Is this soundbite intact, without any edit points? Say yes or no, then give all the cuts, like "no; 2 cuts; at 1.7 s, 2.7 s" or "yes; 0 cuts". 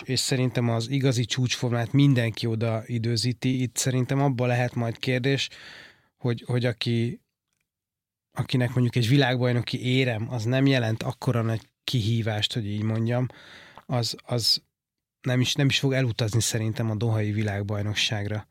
yes; 0 cuts